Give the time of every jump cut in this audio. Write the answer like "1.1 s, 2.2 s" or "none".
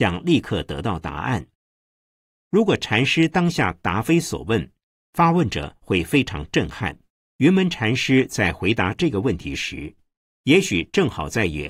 5.0 s, 7.2 s